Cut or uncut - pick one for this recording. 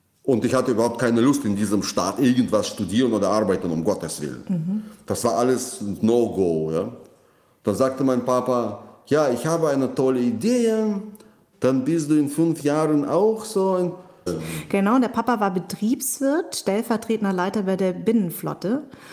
cut